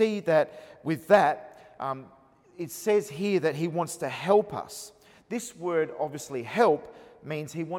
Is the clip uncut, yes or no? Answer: yes